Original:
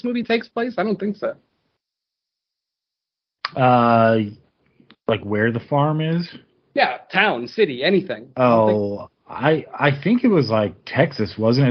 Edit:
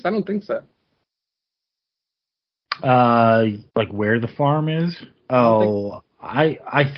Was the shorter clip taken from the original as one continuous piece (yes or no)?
no